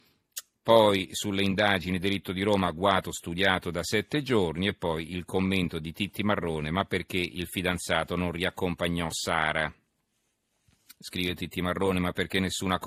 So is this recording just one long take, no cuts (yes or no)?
yes